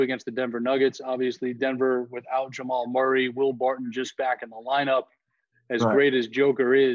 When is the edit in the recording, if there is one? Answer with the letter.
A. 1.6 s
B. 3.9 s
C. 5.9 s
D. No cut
D